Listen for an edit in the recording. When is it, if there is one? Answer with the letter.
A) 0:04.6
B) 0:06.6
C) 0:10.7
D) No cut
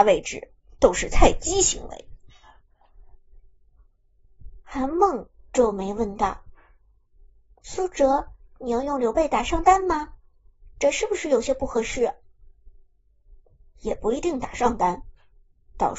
A